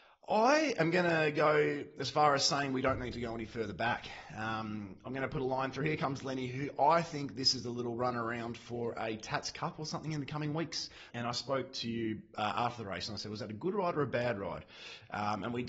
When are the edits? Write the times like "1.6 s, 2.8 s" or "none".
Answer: 11.1 s